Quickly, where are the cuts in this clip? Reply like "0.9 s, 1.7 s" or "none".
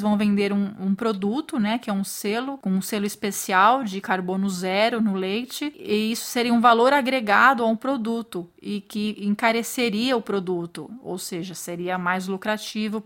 none